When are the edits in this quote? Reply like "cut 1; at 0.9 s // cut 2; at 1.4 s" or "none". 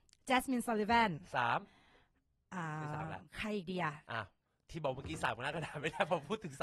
cut 1; at 3.3 s